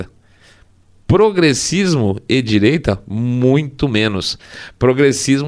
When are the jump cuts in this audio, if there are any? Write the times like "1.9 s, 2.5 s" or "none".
1.0 s